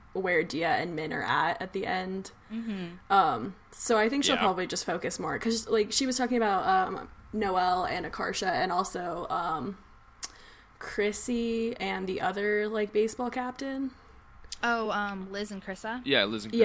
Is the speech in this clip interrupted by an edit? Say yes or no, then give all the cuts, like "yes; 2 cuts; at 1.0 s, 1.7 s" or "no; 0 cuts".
no; 0 cuts